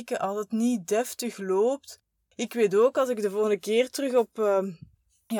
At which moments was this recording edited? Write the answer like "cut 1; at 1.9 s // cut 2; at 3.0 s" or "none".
none